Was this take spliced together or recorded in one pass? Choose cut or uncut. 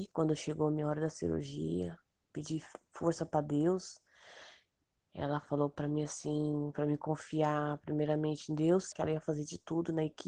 cut